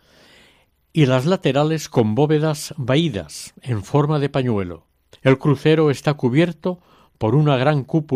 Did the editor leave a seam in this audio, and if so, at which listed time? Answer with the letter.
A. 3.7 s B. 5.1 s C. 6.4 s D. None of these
B